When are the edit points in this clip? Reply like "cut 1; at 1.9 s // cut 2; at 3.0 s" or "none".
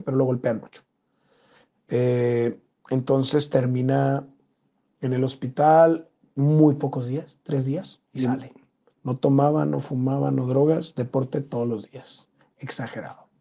cut 1; at 8.9 s